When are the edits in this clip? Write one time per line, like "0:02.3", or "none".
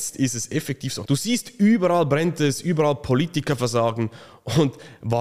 0:01.0